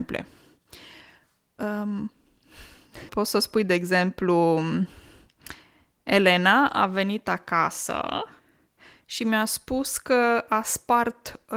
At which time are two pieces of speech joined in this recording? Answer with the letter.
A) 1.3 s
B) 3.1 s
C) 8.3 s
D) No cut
B